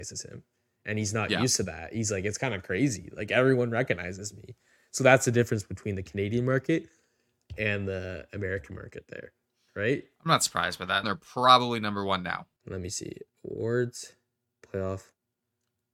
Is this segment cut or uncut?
cut